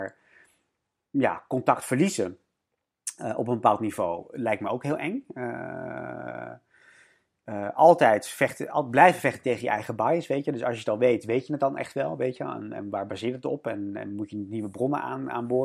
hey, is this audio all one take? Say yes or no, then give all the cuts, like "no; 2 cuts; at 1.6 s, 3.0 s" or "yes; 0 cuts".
yes; 0 cuts